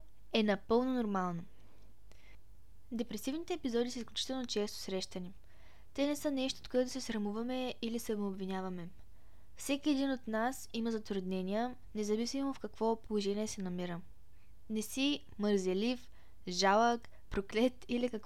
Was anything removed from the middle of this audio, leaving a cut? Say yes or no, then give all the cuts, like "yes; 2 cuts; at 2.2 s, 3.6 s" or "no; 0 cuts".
yes; 1 cut; at 17.3 s